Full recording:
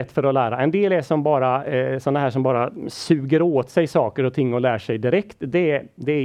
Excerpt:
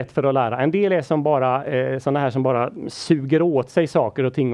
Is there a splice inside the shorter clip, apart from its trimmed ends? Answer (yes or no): no